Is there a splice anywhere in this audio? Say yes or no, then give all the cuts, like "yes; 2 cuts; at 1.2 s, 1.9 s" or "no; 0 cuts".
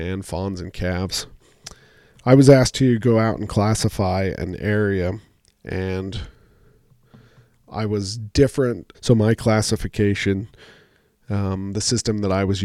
yes; 1 cut; at 8.9 s